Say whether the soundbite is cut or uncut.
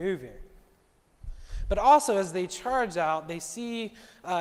uncut